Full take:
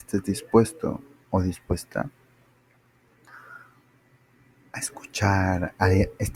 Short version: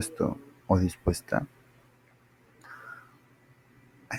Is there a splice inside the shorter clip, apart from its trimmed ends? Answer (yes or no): no